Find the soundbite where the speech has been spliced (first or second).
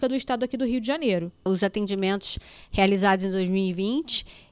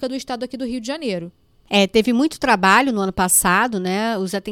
first